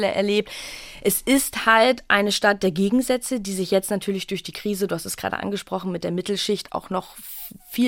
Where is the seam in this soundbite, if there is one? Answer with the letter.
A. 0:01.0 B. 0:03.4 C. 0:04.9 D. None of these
D